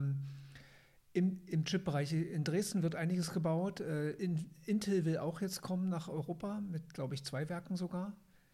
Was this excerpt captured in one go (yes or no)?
yes